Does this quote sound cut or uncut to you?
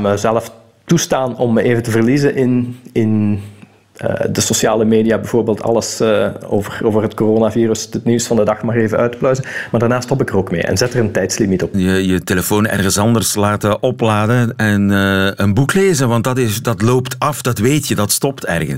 cut